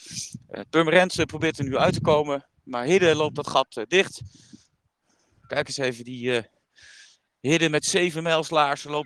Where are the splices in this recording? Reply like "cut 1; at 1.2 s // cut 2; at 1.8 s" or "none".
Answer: none